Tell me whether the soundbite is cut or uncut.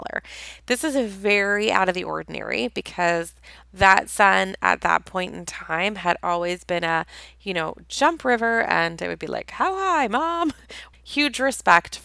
cut